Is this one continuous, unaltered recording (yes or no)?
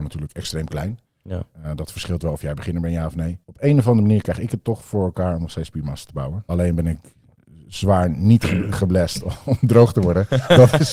no